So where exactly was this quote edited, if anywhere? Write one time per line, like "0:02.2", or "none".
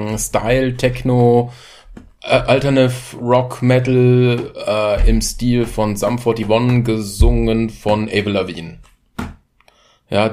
none